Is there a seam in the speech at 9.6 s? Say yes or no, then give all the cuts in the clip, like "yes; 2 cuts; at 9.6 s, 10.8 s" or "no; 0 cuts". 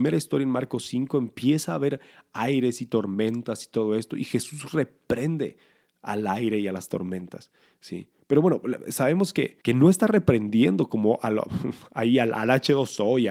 yes; 1 cut; at 9.6 s